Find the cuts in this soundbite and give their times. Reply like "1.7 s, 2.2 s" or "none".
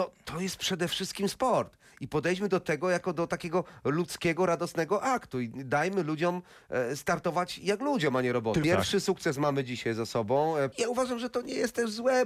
8.6 s, 10.7 s